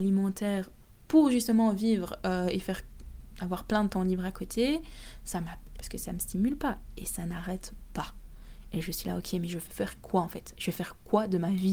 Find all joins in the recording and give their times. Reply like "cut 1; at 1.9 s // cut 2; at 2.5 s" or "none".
cut 1; at 5.7 s